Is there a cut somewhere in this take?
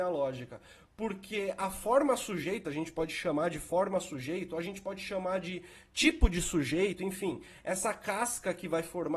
no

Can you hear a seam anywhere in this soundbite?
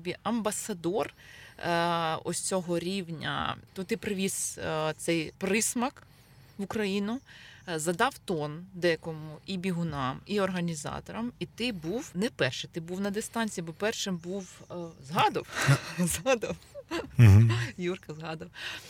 no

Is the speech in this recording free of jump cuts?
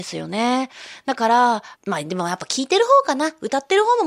no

